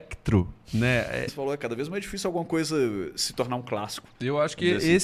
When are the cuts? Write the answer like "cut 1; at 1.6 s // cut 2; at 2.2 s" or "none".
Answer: cut 1; at 1.3 s